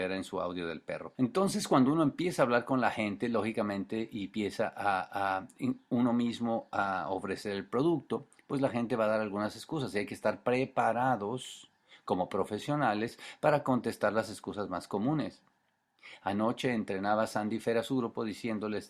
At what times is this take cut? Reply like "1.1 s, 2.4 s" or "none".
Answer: 1.1 s